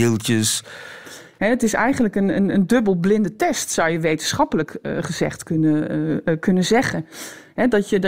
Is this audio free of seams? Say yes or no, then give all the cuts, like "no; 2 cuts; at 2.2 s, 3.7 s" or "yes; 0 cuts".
no; 1 cut; at 1.4 s